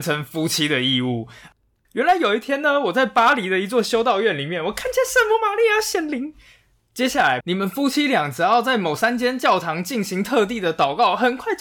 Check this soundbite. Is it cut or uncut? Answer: cut